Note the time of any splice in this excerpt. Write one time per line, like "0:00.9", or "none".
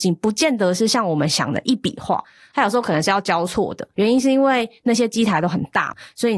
none